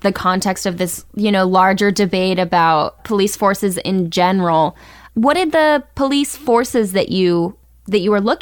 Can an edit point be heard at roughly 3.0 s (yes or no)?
yes